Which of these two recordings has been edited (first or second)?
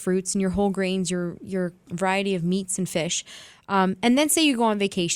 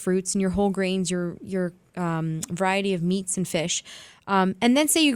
first